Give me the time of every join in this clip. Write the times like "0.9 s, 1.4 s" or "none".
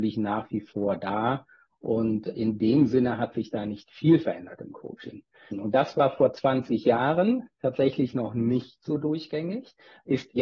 5.5 s, 7.5 s